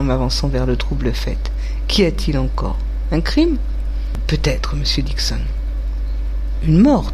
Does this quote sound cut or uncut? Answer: uncut